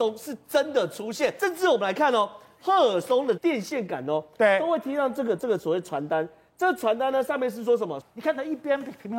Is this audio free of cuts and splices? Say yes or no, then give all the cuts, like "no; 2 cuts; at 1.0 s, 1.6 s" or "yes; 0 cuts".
no; 2 cuts; at 3.4 s, 8.0 s